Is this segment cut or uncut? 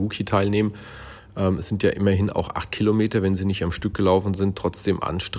uncut